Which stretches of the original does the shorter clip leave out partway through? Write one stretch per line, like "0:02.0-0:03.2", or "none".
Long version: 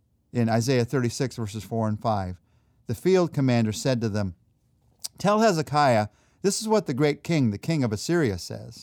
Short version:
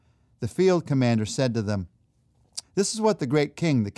0:05.1-0:06.3